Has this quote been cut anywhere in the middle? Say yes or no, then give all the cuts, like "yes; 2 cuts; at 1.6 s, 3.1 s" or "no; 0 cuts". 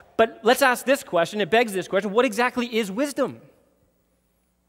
no; 0 cuts